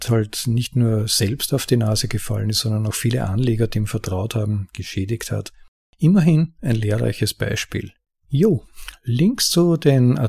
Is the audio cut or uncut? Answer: uncut